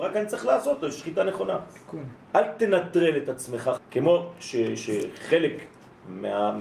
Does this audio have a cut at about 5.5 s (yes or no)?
no